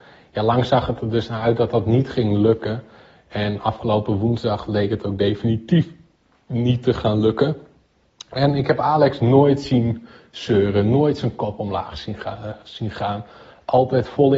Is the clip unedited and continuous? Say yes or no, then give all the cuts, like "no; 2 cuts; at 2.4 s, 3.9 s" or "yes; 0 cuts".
yes; 0 cuts